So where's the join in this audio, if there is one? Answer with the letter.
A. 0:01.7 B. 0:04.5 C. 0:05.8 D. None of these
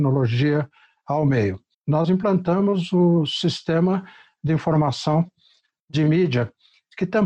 A